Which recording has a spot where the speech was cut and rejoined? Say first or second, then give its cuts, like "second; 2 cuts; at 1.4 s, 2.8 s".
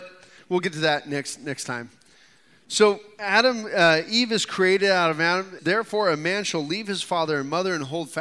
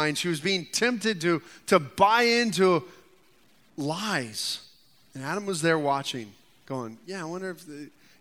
first; 1 cut; at 5.6 s